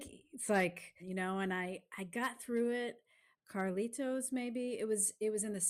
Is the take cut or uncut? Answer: cut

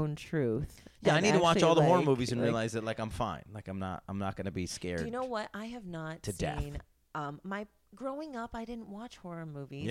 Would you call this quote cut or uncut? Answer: uncut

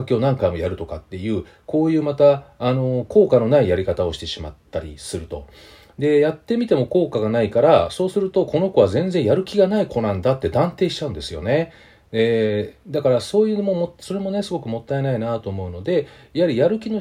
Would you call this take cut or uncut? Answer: uncut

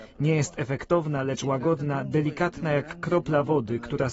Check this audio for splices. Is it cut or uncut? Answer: uncut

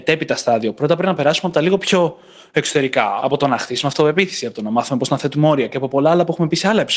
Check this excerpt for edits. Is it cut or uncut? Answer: uncut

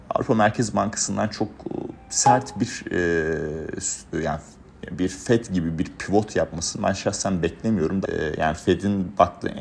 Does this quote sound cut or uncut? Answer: cut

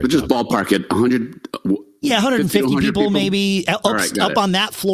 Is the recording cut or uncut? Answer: uncut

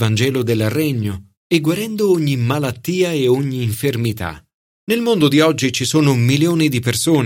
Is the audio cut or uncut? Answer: cut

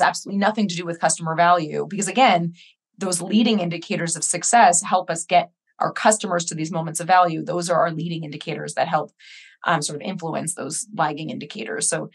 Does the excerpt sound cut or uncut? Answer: uncut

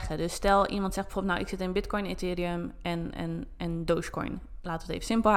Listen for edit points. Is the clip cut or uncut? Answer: uncut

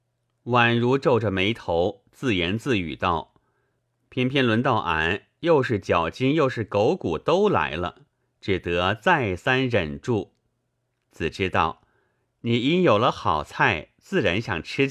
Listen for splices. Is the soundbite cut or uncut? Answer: cut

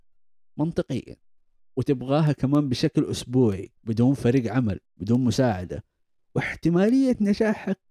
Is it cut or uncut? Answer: cut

